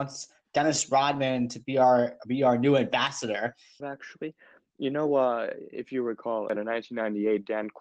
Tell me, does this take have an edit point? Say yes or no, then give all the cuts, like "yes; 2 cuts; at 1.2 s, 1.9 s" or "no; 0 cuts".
yes; 1 cut; at 3.8 s